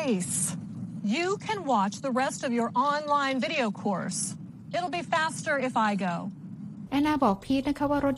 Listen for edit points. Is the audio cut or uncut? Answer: cut